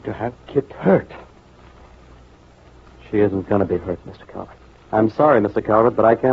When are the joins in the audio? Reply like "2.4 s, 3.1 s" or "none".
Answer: 4.7 s